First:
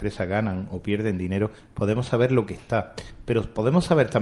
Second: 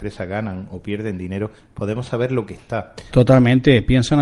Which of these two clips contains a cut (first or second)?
second